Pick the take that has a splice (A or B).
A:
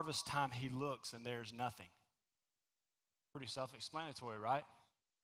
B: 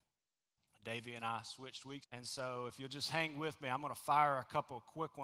B